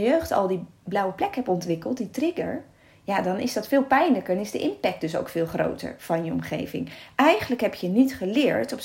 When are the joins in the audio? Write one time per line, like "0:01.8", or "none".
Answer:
none